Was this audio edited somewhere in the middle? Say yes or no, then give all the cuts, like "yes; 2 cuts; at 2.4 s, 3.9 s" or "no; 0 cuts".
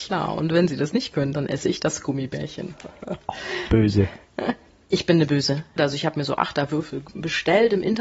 yes; 1 cut; at 5.8 s